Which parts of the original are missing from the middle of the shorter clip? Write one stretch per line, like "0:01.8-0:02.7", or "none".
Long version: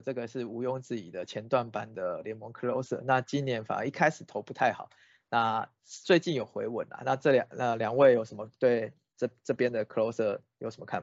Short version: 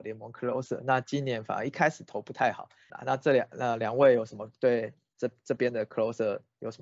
0:05.1-0:06.9